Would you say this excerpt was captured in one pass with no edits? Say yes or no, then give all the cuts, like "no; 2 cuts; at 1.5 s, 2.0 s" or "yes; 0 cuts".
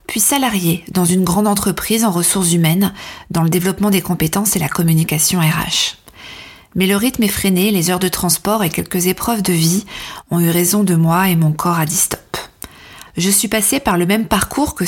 no; 1 cut; at 13.1 s